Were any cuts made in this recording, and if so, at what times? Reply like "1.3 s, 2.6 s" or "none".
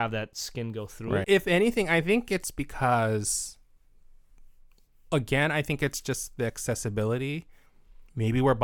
1.2 s